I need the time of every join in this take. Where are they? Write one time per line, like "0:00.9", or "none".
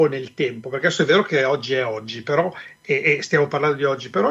none